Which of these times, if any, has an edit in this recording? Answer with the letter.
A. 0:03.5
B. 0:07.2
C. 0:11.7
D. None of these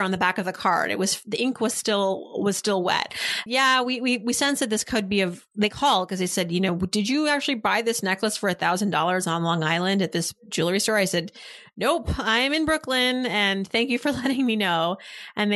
A